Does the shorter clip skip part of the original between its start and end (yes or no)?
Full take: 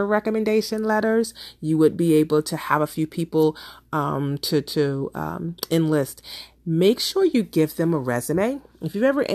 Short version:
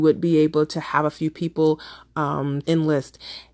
yes